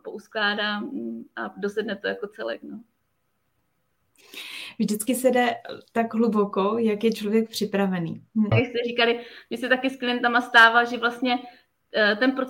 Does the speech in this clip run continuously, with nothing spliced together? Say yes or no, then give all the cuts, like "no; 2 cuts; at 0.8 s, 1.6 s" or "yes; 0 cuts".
no; 1 cut; at 8.5 s